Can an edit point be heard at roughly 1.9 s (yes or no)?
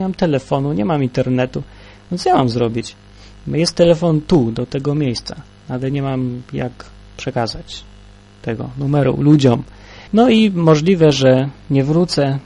no